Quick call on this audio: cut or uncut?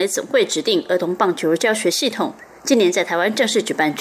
uncut